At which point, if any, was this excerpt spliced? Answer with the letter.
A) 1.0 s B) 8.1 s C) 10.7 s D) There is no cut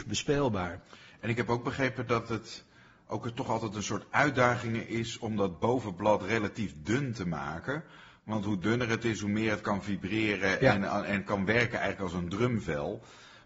D